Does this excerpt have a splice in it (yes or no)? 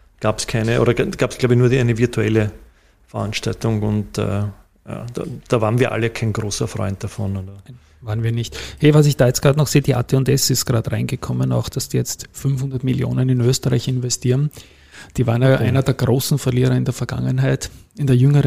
no